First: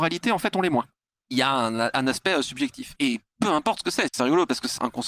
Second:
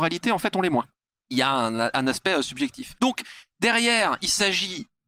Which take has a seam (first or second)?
first